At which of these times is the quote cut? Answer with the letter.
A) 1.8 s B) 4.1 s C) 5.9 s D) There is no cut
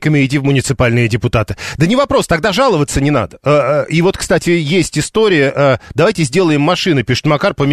D